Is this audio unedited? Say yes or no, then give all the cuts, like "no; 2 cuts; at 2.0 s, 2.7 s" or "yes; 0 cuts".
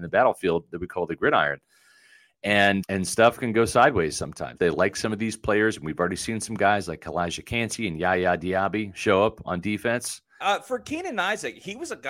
no; 3 cuts; at 2.8 s, 4.6 s, 10.4 s